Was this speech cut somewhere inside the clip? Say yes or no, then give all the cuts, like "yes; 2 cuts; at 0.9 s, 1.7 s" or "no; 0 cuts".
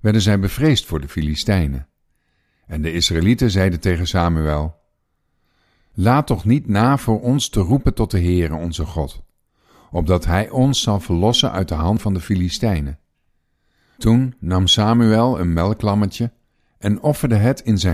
no; 0 cuts